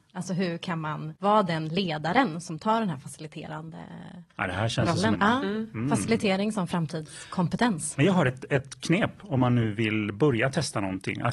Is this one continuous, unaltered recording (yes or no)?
no